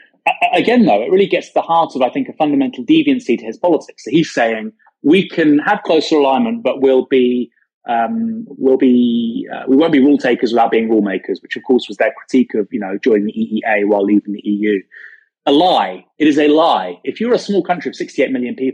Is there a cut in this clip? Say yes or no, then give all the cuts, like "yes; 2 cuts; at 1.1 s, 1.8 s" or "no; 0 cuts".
no; 0 cuts